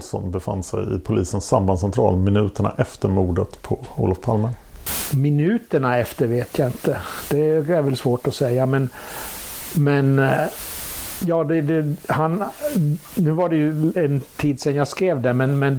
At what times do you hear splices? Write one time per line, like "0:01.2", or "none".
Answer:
none